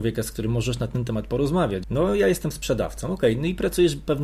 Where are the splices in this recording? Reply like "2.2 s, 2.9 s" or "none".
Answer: 1.8 s